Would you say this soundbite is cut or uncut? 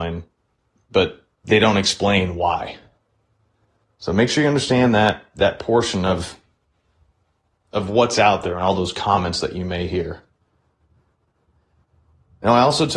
uncut